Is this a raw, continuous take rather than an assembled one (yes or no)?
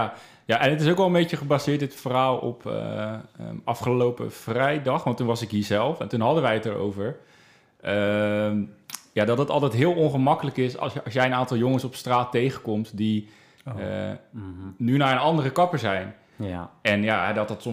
yes